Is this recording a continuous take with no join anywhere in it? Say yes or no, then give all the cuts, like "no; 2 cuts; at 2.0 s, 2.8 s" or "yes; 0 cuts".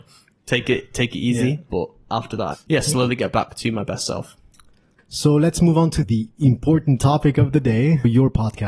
no; 2 cuts; at 2.5 s, 4.9 s